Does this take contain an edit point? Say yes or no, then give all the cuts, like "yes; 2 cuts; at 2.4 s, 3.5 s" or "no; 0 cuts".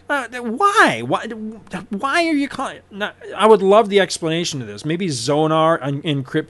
no; 0 cuts